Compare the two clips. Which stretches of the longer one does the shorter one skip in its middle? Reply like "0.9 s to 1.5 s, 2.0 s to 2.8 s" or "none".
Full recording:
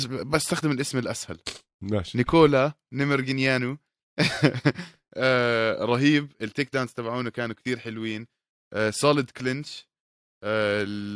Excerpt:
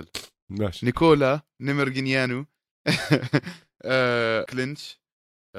5.8 s to 9.3 s